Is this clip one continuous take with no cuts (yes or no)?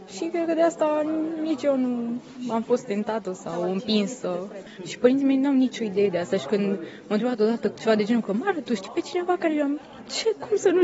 no